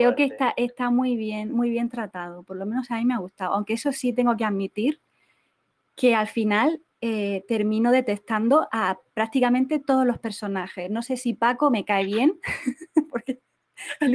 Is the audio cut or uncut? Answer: uncut